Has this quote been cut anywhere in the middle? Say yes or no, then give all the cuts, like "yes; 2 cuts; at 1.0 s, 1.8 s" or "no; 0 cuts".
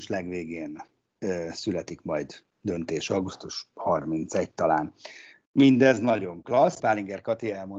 yes; 2 cuts; at 5.5 s, 6.8 s